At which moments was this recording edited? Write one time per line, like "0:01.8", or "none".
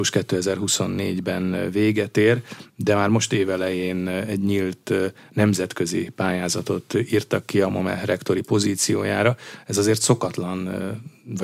none